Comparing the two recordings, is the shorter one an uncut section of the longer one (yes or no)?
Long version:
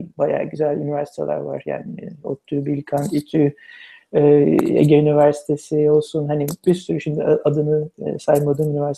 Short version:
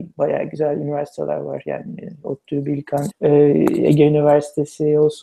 no